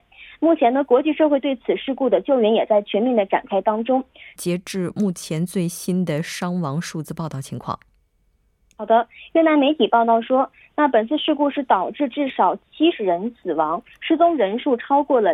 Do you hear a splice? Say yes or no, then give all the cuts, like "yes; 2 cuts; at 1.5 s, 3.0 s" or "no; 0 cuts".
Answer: yes; 1 cut; at 4.4 s